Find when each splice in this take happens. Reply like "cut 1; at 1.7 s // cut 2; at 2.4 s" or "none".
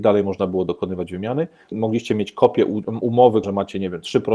cut 1; at 1.7 s // cut 2; at 3.4 s